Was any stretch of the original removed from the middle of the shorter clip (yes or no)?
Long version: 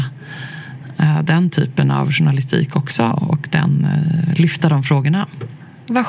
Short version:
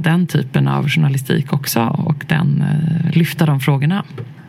no